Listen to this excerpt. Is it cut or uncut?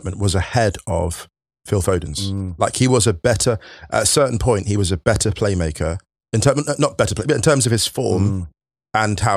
uncut